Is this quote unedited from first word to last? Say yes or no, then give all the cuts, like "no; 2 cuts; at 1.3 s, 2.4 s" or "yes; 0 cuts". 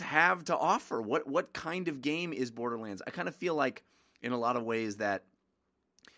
yes; 0 cuts